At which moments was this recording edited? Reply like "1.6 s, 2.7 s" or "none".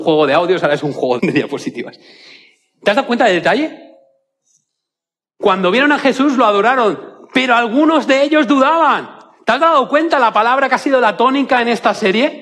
1.2 s